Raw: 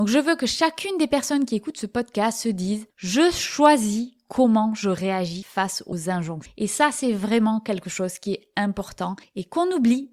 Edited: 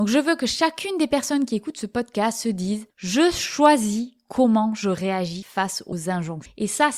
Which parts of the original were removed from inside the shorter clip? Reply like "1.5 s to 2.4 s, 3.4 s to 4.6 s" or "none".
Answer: none